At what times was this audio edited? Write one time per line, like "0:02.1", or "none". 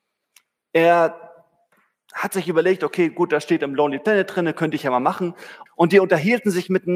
0:05.7